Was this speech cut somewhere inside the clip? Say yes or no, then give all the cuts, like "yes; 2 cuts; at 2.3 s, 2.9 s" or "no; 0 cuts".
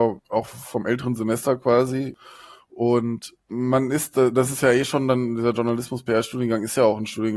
no; 0 cuts